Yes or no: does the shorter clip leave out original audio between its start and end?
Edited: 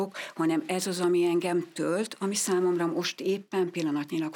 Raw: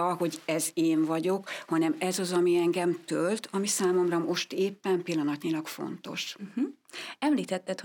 no